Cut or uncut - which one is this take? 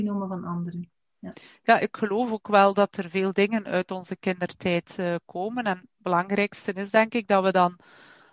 uncut